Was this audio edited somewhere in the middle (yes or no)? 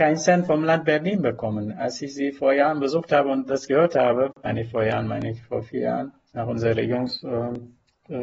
no